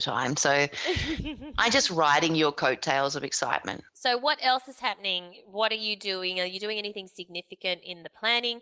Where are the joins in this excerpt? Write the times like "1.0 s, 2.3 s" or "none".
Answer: 3.9 s

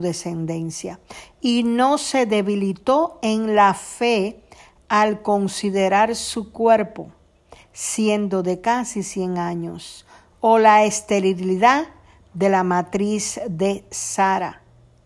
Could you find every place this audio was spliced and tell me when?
7.6 s

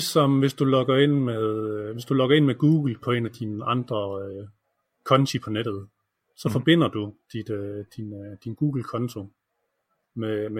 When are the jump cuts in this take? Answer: none

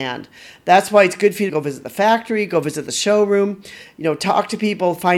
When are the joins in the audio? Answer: 1.5 s

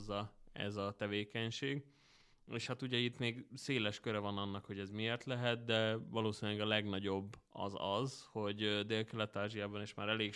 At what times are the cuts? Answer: none

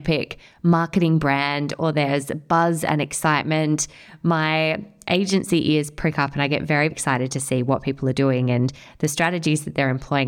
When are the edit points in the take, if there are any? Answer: 6.9 s

